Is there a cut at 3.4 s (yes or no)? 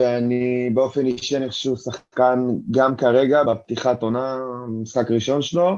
yes